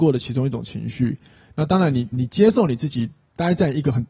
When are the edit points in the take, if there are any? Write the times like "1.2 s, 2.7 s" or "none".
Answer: 2.1 s